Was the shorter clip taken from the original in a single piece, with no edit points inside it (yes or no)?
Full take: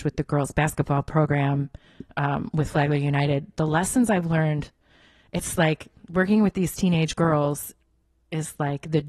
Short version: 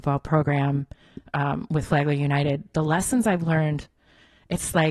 yes